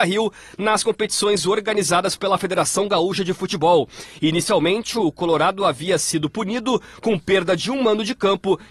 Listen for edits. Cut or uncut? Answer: uncut